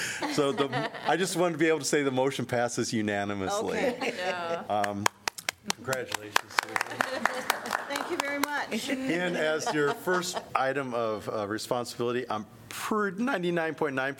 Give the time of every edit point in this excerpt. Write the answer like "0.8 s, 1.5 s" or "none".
4.7 s, 10.5 s